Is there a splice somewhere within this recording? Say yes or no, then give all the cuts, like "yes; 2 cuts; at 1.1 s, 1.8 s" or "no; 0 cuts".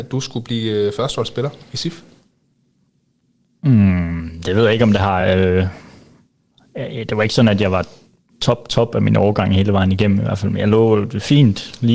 no; 0 cuts